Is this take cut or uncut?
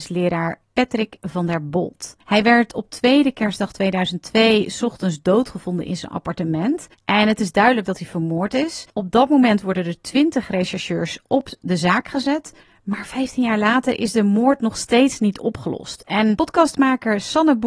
uncut